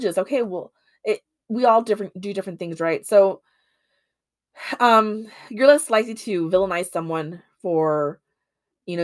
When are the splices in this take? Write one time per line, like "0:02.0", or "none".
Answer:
none